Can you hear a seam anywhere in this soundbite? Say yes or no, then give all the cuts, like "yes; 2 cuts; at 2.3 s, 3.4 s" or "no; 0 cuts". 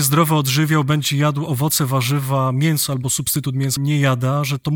yes; 1 cut; at 3.8 s